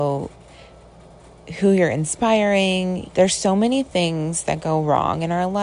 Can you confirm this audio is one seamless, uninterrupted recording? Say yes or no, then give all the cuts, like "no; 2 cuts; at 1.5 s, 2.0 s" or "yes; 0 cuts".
no; 1 cut; at 3.1 s